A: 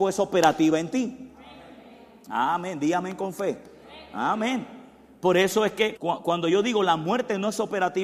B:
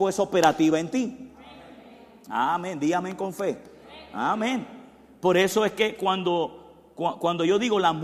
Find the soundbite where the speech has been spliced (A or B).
A